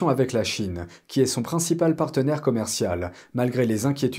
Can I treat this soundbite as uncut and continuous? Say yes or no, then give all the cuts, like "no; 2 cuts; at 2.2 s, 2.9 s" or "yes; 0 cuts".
yes; 0 cuts